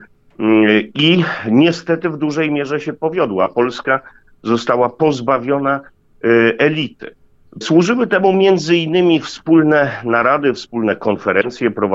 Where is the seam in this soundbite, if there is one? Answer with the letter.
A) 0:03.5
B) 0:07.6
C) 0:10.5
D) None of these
B